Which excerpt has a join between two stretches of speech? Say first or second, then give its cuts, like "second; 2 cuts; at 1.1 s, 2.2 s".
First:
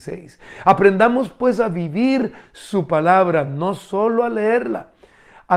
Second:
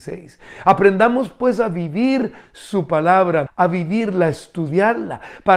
second; 1 cut; at 3.5 s